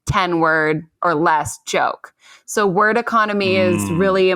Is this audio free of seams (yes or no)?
yes